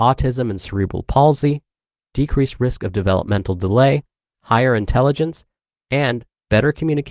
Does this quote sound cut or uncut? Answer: uncut